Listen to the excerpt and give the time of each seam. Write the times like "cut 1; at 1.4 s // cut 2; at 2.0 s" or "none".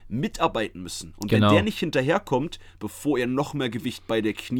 cut 1; at 2.7 s